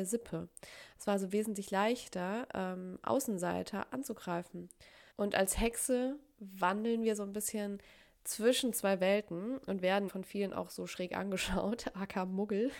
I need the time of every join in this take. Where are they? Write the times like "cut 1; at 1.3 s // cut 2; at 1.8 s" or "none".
cut 1; at 5.1 s // cut 2; at 10.1 s